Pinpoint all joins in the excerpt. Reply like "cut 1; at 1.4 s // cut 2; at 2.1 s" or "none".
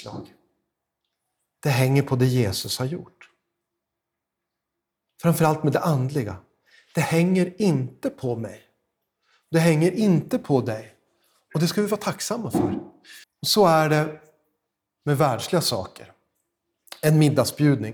cut 1; at 5.1 s // cut 2; at 13.2 s